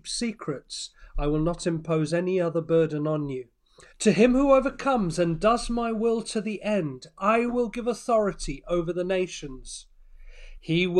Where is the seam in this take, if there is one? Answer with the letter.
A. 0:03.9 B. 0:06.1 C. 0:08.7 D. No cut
A